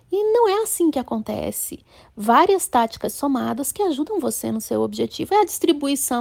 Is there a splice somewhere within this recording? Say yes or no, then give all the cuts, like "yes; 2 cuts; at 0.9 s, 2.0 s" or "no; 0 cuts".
no; 0 cuts